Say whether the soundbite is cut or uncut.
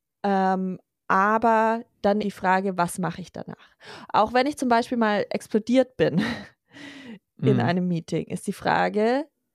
cut